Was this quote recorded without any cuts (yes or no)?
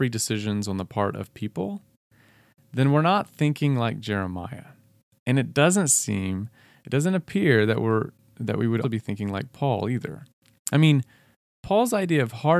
no